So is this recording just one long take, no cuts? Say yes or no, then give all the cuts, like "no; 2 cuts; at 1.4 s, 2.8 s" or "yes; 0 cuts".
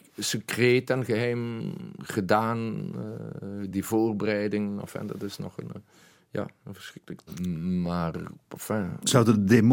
yes; 0 cuts